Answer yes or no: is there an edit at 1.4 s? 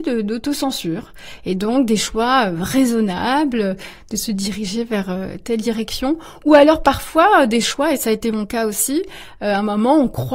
no